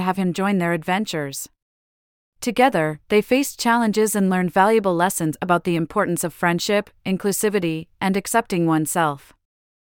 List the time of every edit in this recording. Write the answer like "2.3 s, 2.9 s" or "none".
none